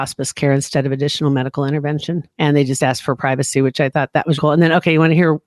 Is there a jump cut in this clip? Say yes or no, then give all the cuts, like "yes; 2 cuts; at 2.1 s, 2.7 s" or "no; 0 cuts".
yes; 2 cuts; at 2.3 s, 4.4 s